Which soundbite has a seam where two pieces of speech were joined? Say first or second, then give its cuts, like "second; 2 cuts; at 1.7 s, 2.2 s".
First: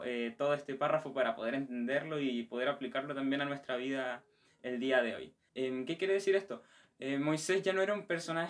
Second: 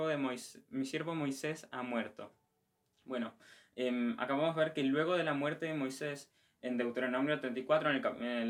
first; 1 cut; at 5.5 s